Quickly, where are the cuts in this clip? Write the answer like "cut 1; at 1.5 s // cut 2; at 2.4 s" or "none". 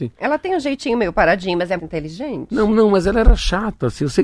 cut 1; at 1.8 s